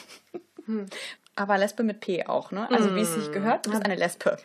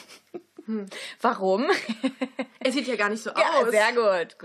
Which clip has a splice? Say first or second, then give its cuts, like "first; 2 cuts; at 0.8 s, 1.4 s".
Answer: first; 1 cut; at 1.2 s